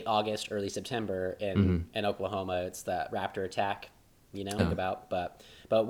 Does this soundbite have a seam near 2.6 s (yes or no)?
no